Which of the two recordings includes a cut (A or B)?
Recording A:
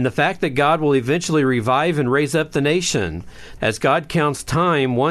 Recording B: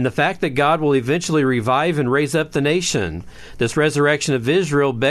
A